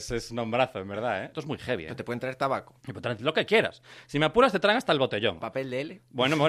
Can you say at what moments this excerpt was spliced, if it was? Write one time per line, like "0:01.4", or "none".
0:01.3
0:02.8